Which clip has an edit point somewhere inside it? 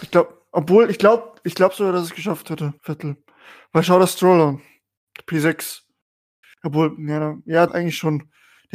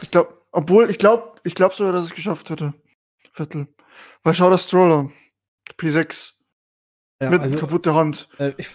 first; 3 cuts; at 2.8 s, 6.4 s, 7.7 s

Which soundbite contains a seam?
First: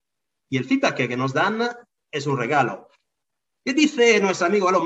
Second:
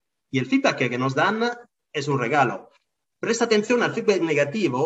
second; 1 cut; at 3.1 s

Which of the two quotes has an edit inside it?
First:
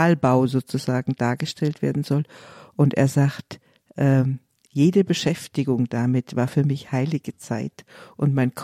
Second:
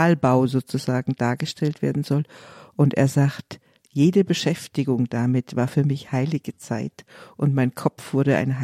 second; 1 cut; at 3.8 s

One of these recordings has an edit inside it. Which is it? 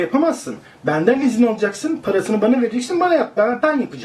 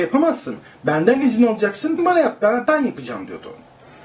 second; 1 cut; at 2.0 s

